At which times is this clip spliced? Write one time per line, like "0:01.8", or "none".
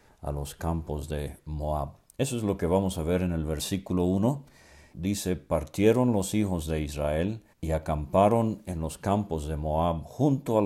0:04.9
0:07.5